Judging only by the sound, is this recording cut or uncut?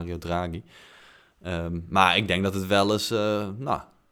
uncut